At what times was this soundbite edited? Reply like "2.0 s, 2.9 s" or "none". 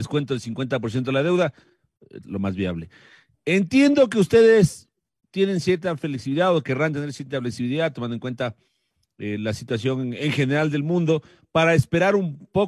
2.2 s

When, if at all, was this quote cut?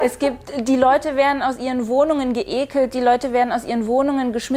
none

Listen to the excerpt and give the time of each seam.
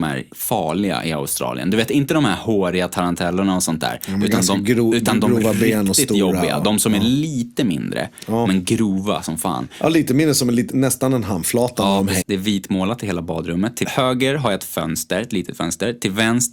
12.2 s

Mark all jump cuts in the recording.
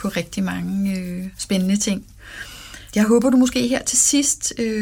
none

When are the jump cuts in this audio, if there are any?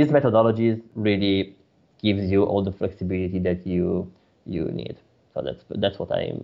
none

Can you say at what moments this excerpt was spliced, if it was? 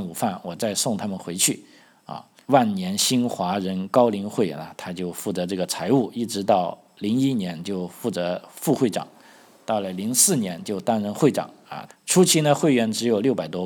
2.4 s, 11.9 s

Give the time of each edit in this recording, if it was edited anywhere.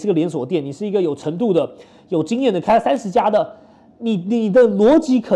none

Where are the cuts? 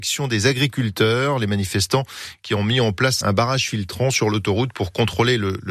3.2 s

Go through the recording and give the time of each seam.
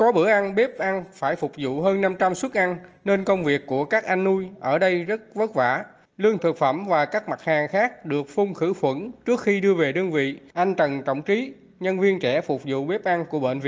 6.4 s, 10.5 s

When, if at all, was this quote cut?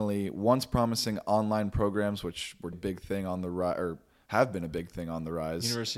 2.7 s

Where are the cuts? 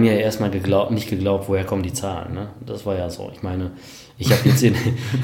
none

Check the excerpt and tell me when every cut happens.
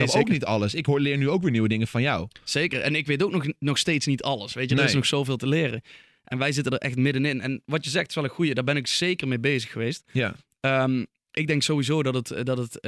none

